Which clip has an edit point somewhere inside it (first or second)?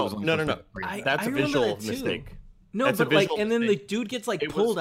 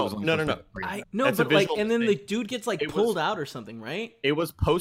second